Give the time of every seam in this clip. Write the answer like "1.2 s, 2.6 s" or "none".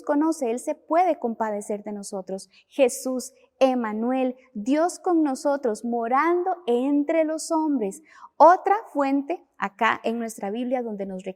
none